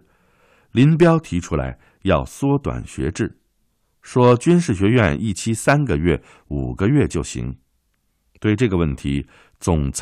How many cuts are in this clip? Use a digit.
0